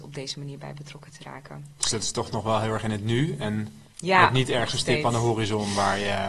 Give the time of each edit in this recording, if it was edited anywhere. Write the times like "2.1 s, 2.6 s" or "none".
3.9 s